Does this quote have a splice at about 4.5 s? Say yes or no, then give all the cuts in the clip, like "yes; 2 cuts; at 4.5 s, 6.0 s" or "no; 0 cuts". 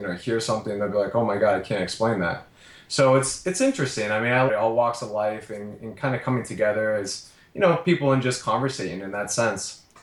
yes; 1 cut; at 4.5 s